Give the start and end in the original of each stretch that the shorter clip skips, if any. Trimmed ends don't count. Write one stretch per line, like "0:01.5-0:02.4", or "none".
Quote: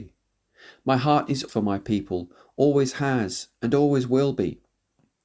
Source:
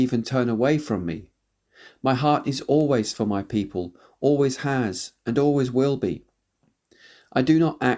0:02.7-0:03.1